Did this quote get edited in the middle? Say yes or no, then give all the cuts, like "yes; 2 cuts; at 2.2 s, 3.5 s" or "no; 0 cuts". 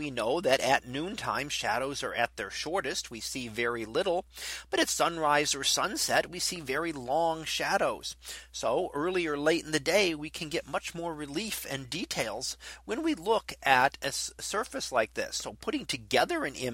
no; 0 cuts